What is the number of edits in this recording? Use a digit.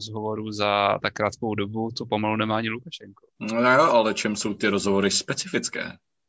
0